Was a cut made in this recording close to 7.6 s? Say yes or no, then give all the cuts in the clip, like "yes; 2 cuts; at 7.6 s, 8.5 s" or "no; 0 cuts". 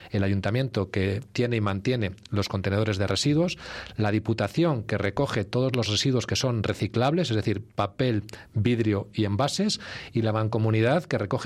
no; 0 cuts